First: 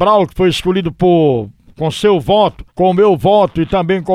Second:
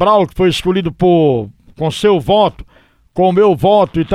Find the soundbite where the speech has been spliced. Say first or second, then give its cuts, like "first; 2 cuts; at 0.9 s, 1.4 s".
first; 1 cut; at 2.7 s